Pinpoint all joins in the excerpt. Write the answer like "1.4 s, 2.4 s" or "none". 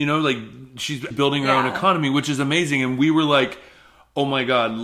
1.1 s

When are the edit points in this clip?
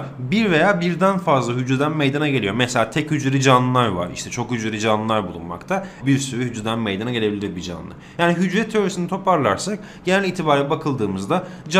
6.0 s

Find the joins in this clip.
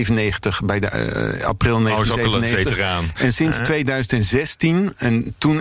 none

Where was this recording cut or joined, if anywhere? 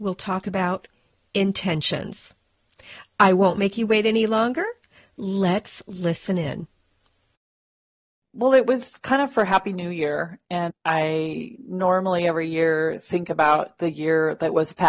10.7 s

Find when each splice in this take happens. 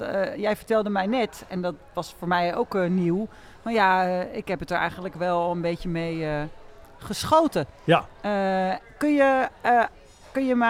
none

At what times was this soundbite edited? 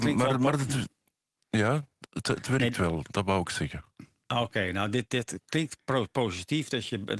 none

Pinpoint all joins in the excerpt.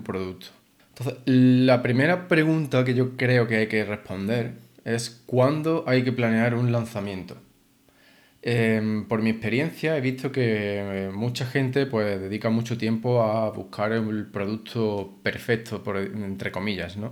none

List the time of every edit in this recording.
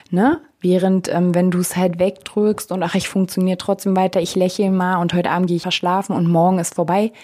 5.6 s

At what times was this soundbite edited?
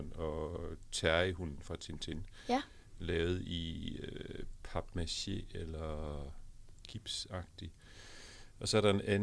none

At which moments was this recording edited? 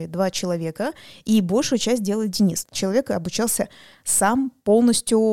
2.6 s

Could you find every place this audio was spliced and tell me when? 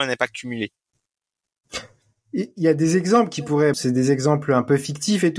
3.7 s

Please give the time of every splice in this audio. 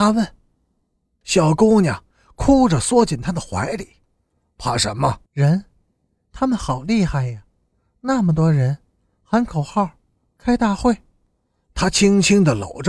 1.2 s, 5.3 s

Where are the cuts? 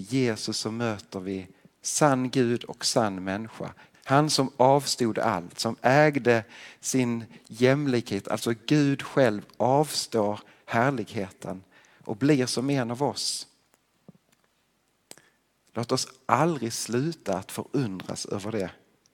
3.9 s

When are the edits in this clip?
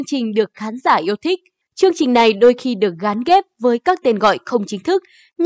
1.6 s

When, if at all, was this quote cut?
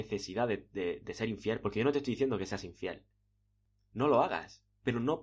none

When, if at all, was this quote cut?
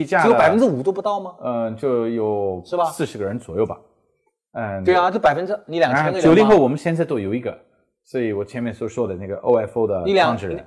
none

